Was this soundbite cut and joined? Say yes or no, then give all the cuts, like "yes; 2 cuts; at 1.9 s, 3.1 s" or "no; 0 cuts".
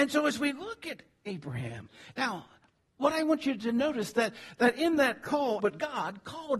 yes; 2 cuts; at 2.1 s, 5.6 s